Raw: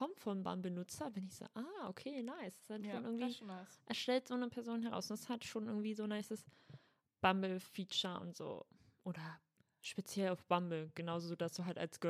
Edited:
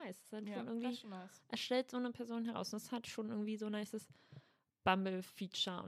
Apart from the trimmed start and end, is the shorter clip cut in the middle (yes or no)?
no